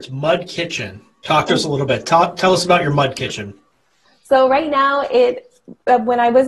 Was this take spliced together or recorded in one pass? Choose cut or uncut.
uncut